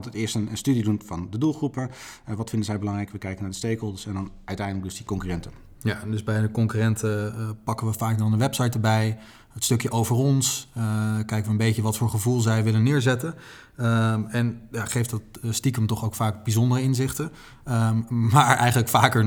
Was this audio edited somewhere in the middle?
no; 0 cuts

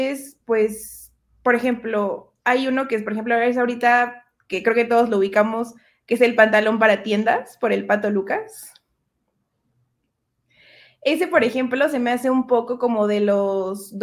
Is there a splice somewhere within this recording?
no; 0 cuts

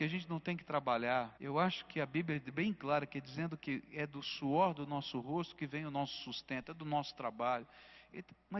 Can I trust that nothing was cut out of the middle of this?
no; 1 cut; at 1.4 s

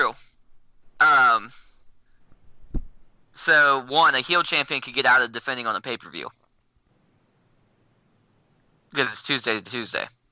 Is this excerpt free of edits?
yes; 0 cuts

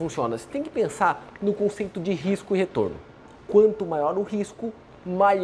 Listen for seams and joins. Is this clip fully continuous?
no; 1 cut; at 3.3 s

